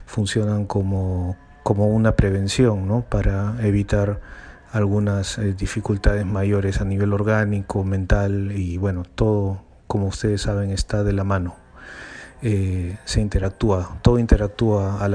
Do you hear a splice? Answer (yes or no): no